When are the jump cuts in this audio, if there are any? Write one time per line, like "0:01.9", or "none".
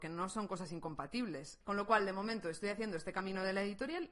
0:01.6